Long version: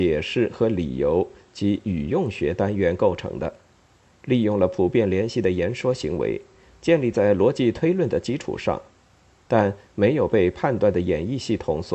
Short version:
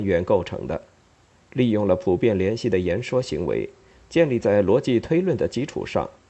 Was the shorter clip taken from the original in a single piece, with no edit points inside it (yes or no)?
yes